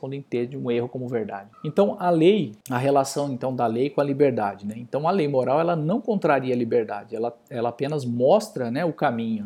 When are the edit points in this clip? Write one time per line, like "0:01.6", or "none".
0:01.5
0:02.6